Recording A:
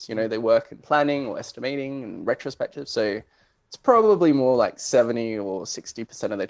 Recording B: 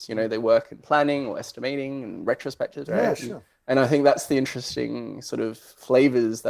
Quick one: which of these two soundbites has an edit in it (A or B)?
B